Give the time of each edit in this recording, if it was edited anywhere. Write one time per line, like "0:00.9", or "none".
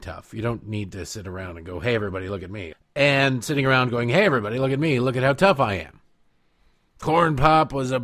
0:02.7